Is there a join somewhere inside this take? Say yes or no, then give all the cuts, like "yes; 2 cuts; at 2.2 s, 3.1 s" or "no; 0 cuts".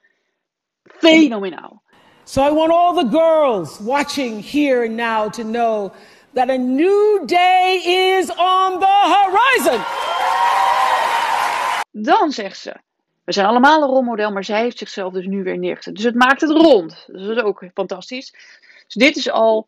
yes; 2 cuts; at 13.1 s, 18.6 s